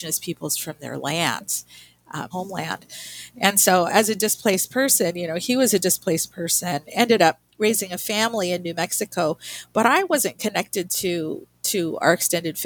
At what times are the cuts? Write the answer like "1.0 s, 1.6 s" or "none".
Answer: 2.3 s